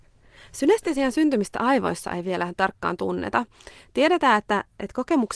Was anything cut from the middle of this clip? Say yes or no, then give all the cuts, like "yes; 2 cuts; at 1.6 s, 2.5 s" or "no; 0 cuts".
no; 0 cuts